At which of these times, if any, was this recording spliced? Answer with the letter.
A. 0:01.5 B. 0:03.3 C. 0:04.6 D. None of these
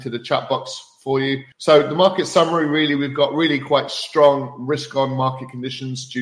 A